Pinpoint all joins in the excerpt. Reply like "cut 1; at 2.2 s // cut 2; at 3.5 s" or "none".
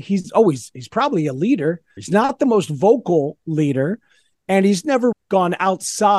cut 1; at 2.0 s // cut 2; at 5.1 s